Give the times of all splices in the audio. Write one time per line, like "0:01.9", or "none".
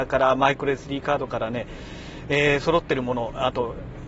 none